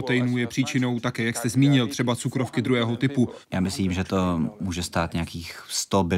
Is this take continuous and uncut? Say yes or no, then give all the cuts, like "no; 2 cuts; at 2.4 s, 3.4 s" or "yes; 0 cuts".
no; 1 cut; at 3.4 s